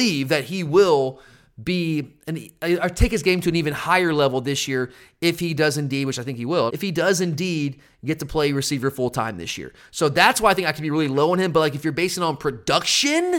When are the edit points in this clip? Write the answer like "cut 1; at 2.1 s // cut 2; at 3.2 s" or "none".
cut 1; at 6.7 s